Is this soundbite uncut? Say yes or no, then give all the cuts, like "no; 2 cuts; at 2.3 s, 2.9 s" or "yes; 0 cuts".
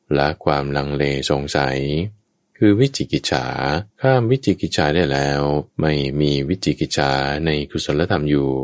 no; 2 cuts; at 3.9 s, 5.7 s